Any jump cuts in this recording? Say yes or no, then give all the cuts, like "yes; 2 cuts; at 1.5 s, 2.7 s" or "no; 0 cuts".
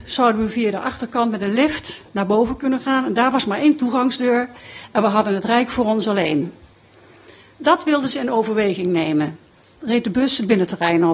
yes; 1 cut; at 9.8 s